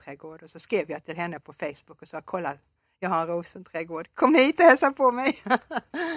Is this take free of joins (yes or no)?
yes